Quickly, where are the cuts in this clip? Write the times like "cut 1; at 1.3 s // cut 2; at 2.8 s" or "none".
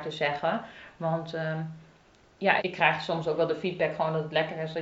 cut 1; at 2.6 s